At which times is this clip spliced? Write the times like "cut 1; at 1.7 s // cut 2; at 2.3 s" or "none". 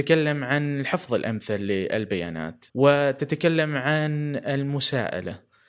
cut 1; at 2.7 s